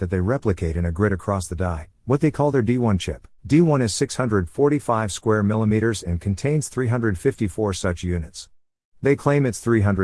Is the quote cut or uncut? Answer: cut